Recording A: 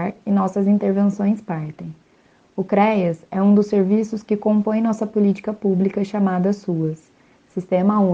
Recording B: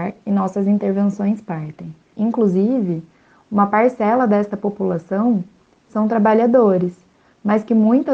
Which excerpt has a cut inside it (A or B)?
B